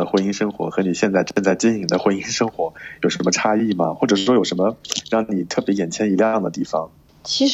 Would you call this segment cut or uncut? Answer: uncut